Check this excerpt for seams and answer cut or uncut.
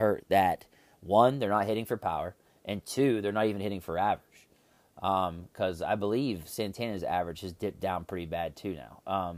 uncut